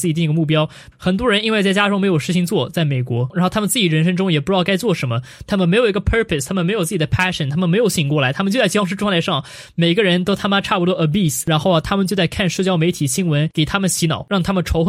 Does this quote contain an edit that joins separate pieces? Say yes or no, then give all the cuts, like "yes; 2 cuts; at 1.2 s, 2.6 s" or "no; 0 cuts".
yes; 1 cut; at 0.9 s